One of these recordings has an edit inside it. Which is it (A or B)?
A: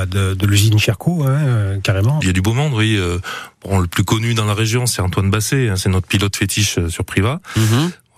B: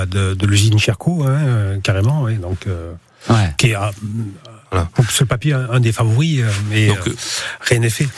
A